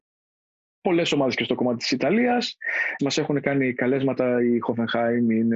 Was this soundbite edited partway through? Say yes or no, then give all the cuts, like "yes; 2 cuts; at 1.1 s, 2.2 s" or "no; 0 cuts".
yes; 1 cut; at 3.0 s